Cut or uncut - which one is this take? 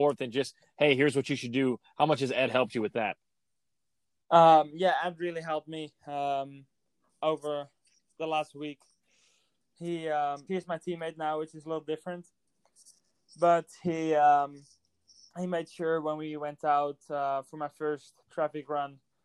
cut